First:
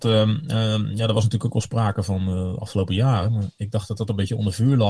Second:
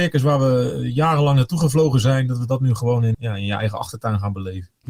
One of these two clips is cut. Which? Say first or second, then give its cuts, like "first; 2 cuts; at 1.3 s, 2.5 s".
second; 1 cut; at 3.1 s